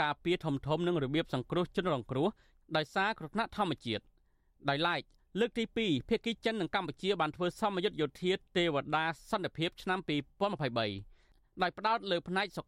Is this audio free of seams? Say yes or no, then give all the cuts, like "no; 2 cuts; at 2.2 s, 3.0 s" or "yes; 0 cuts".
yes; 0 cuts